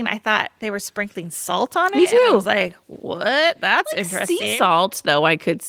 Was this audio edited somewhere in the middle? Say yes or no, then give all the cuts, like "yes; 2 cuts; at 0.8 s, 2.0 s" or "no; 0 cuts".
no; 0 cuts